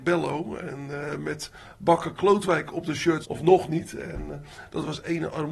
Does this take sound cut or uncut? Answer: cut